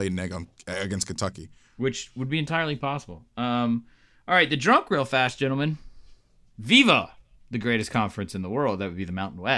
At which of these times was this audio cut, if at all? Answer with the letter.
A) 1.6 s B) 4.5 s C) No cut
C